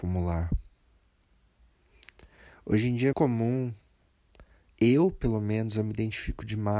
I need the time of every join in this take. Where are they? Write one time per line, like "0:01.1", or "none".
0:03.1